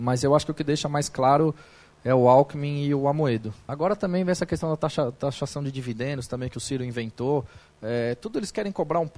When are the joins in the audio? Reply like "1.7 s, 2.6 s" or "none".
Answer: 3.7 s